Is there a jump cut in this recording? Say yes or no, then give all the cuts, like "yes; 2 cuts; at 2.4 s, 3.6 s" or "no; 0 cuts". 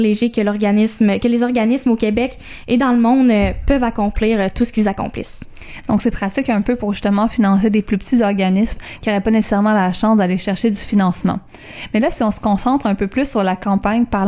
no; 0 cuts